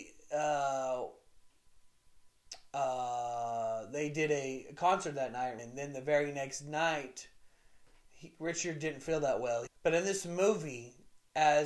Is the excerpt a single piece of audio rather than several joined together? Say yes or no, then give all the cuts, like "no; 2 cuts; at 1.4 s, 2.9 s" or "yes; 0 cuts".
no; 2 cuts; at 5.6 s, 9.7 s